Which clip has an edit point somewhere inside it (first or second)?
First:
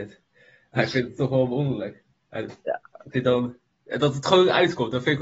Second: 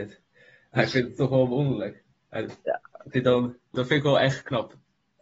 second